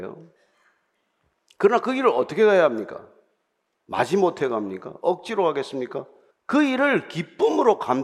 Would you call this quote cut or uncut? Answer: cut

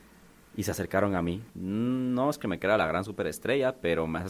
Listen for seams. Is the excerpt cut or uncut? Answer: cut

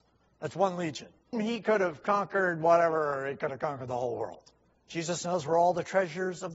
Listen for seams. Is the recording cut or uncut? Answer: cut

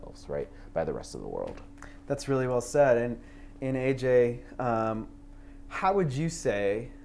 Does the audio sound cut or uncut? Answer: uncut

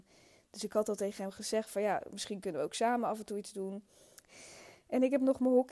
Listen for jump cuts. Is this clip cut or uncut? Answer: cut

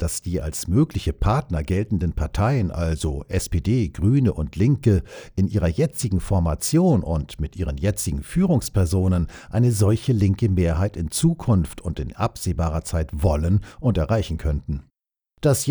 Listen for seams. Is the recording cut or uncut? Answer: uncut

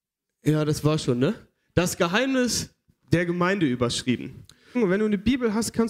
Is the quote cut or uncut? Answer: cut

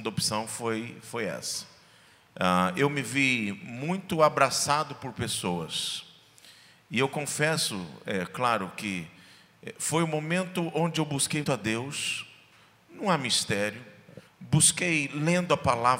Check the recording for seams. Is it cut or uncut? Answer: cut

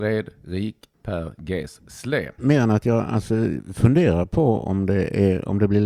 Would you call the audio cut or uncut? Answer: cut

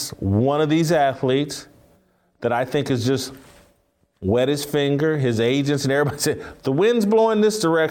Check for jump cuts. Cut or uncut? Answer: uncut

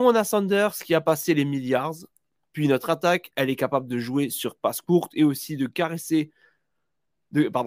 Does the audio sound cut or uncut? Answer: cut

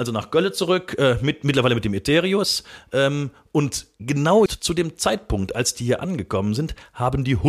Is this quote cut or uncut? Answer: cut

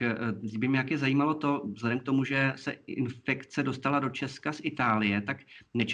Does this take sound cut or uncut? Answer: uncut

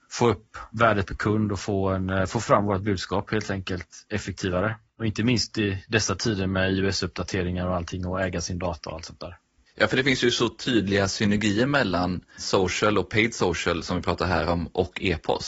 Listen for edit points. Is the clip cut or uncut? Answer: uncut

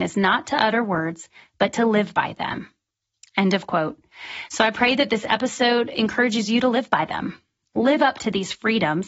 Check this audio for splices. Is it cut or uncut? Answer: uncut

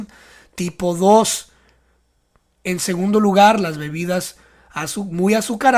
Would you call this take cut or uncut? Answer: uncut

